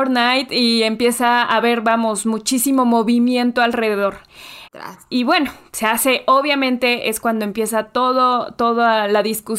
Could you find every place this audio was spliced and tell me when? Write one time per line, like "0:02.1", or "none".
0:04.7